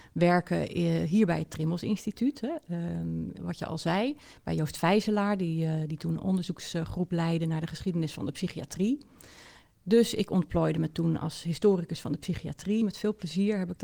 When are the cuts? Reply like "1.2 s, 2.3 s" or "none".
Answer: none

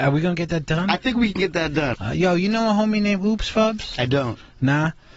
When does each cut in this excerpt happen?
1.9 s

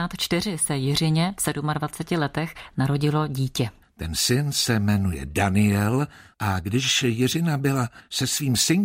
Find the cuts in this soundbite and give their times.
3.8 s, 6.3 s

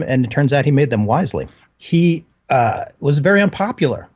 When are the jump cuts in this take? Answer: 1.7 s

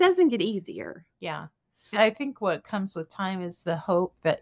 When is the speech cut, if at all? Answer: 1.1 s

